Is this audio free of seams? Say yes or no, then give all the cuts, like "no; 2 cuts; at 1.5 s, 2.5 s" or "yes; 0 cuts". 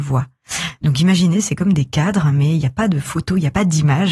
yes; 0 cuts